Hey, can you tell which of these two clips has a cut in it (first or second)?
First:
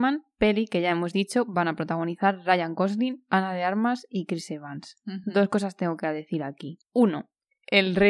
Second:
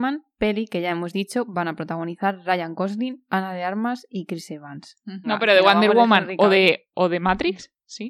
second